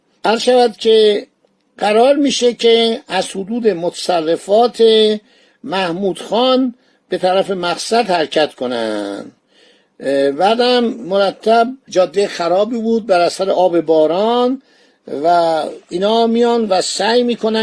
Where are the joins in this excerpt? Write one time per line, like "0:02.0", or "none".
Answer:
0:11.9